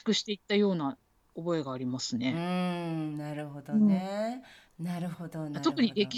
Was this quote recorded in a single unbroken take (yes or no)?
no